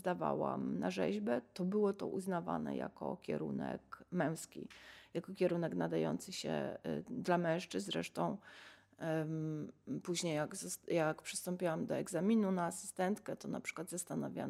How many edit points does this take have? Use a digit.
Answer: 0